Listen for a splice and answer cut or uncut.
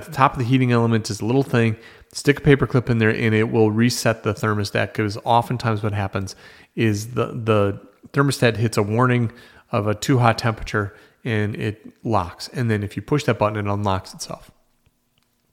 uncut